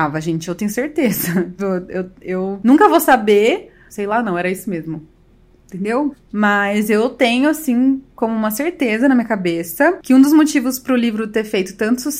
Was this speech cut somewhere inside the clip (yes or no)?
yes